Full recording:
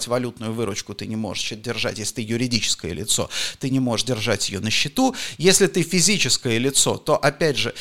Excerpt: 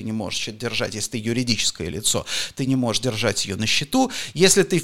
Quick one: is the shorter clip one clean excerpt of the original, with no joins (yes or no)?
yes